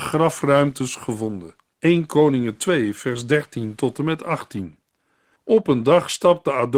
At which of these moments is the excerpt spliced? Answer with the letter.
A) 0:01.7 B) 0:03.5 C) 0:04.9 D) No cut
A